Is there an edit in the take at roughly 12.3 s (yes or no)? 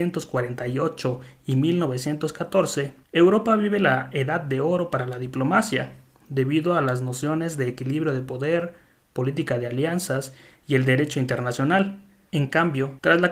yes